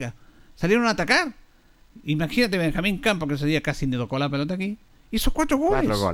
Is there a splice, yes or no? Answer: no